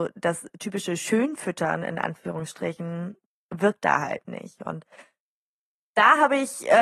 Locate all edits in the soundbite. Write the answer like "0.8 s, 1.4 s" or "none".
none